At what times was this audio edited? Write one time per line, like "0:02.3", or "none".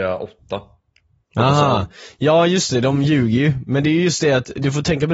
none